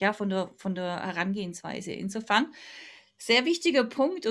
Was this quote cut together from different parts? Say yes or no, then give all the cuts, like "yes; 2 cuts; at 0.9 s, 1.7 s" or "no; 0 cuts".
no; 0 cuts